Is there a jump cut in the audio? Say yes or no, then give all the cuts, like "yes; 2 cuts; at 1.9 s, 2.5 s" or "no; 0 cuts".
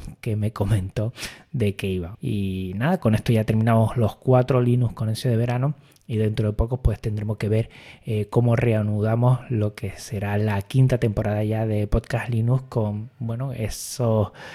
yes; 1 cut; at 2.1 s